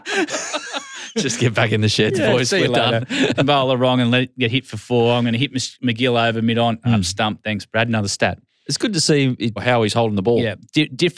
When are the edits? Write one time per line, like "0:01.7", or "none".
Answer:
0:03.4
0:09.6